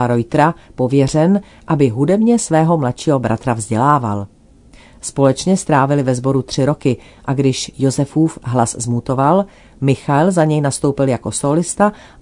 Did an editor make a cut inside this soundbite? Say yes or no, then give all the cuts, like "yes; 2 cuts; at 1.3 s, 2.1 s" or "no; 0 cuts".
no; 0 cuts